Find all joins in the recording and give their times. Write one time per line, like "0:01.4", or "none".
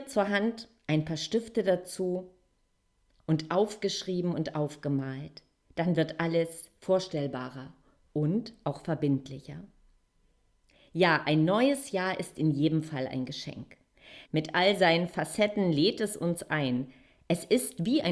0:14.2